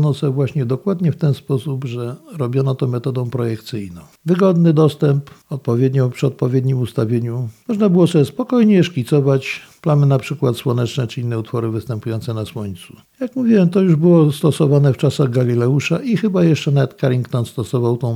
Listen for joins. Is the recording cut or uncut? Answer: cut